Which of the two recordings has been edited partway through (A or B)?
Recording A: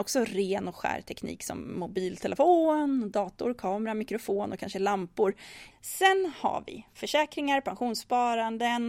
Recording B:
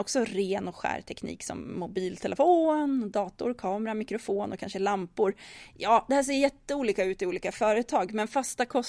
A